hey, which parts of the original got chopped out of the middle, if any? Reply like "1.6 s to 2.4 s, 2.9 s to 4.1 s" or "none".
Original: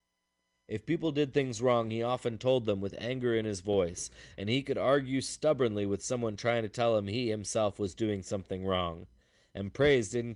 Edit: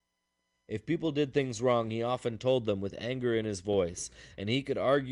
none